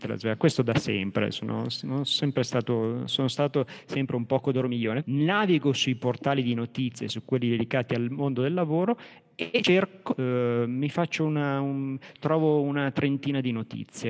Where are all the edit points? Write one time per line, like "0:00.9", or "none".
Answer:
0:05.0